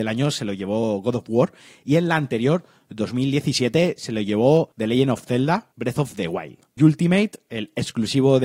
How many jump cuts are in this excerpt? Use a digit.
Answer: 1